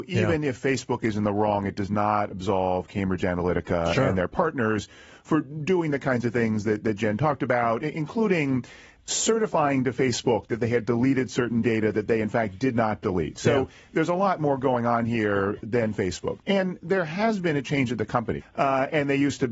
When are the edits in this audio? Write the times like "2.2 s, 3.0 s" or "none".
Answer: 16.4 s, 18.4 s